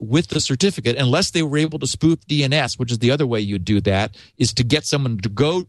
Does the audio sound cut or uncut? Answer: uncut